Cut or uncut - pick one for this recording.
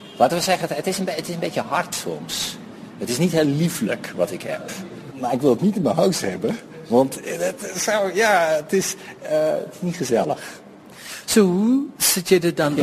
cut